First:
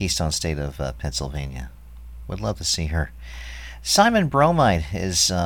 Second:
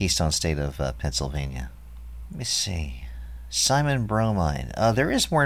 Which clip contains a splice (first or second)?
second